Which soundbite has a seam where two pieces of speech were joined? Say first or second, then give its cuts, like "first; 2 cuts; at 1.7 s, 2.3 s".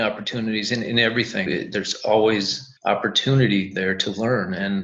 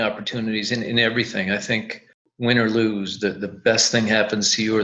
first; 2 cuts; at 1.5 s, 2.8 s